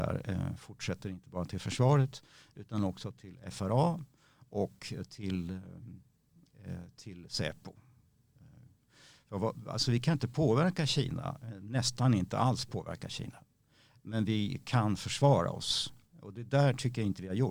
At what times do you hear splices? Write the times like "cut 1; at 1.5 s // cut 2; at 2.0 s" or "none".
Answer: none